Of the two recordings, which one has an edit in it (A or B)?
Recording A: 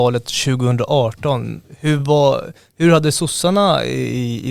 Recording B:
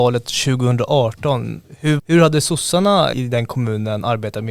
B